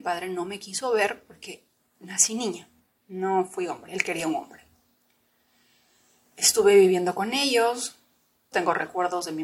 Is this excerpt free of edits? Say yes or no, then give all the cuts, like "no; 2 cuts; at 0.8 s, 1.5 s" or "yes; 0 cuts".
no; 1 cut; at 8.5 s